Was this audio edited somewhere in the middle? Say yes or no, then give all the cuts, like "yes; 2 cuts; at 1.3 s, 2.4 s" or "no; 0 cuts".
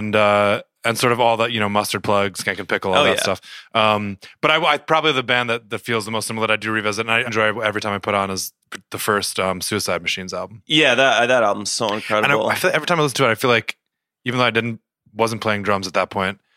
yes; 1 cut; at 7.3 s